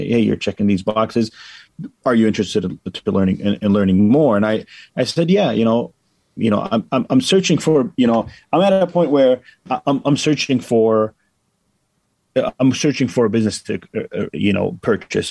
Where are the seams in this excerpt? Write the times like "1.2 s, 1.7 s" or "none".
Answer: 6.4 s, 9.8 s, 14.3 s